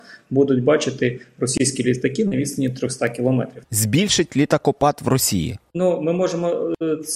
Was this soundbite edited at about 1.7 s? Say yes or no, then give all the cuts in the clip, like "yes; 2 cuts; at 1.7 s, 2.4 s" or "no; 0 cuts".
no; 2 cuts; at 3.6 s, 5.7 s